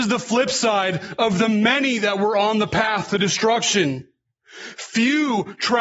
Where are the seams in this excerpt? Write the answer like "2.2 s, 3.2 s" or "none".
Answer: none